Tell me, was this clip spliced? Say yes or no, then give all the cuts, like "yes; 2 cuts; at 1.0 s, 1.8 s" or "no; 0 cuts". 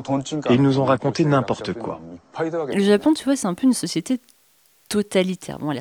no; 0 cuts